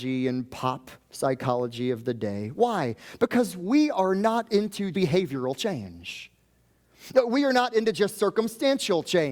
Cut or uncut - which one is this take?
cut